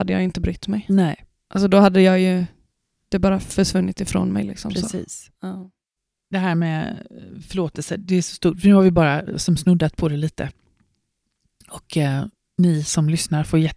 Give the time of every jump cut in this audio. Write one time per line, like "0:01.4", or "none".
none